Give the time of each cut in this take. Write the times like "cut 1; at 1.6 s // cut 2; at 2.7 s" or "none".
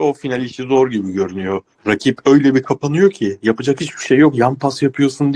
cut 1; at 1.7 s